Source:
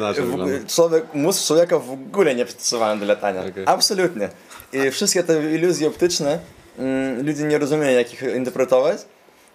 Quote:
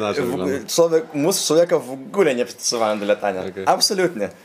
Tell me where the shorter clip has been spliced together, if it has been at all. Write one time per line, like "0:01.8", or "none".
none